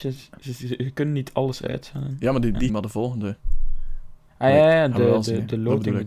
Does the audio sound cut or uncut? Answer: cut